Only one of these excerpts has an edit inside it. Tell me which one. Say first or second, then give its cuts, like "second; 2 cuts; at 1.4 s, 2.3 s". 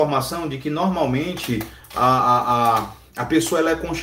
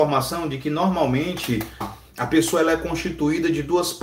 second; 1 cut; at 1.8 s